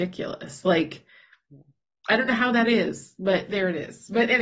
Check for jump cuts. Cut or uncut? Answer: uncut